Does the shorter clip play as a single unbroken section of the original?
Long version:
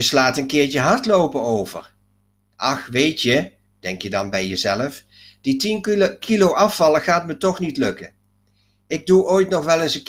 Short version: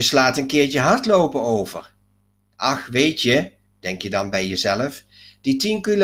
yes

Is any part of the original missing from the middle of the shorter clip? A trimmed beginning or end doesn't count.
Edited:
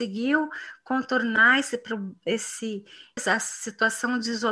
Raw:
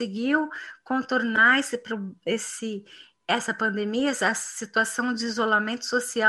yes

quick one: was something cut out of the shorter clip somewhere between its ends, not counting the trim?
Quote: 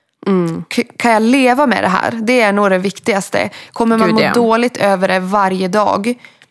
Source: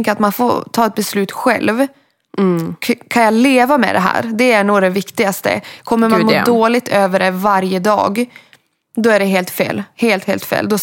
no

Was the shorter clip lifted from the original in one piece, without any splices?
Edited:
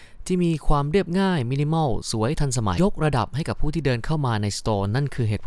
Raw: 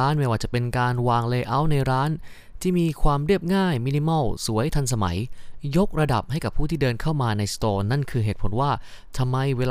no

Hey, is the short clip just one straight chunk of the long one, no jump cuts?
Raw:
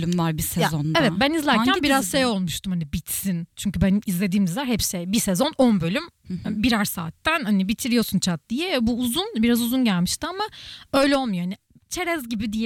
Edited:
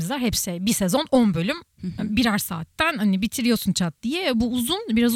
yes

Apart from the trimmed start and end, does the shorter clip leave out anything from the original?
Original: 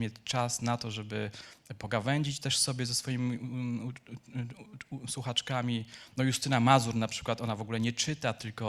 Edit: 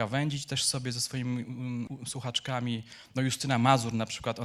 yes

